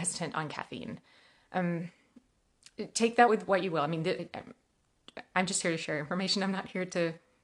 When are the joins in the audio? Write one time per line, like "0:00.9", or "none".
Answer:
none